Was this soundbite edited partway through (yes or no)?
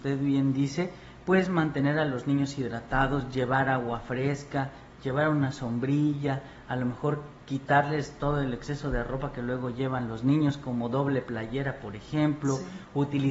no